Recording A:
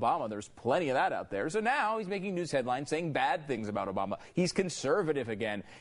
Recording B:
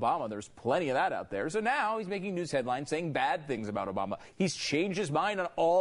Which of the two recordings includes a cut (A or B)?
B